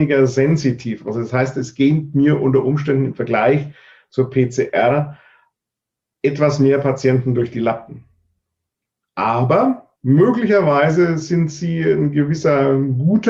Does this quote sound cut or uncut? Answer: cut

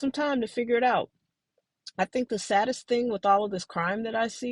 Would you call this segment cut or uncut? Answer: uncut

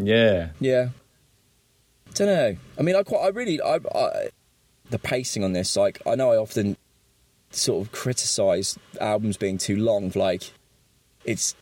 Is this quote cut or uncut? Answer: cut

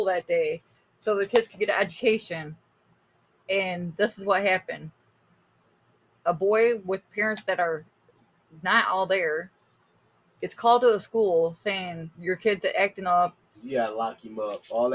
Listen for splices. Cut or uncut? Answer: cut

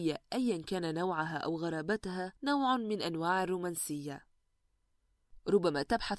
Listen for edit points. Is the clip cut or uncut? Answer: cut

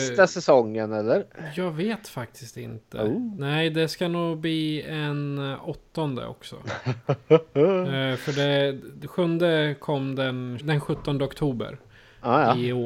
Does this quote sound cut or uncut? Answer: cut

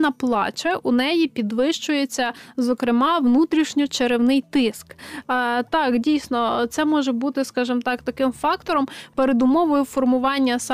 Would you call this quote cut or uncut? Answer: cut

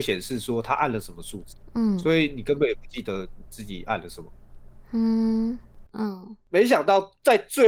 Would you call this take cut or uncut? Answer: cut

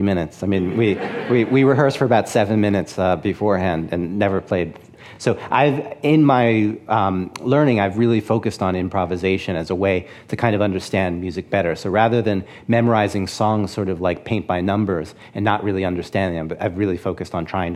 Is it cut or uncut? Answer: uncut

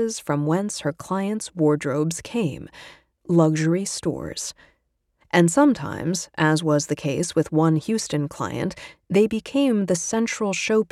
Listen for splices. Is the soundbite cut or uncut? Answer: cut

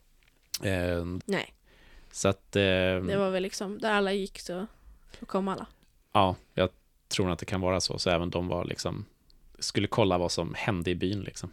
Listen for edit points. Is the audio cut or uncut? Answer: cut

